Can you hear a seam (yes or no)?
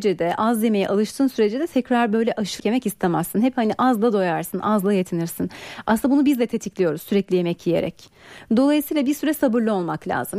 yes